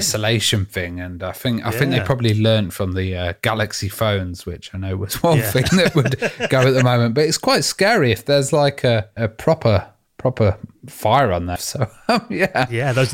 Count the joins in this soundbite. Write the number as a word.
two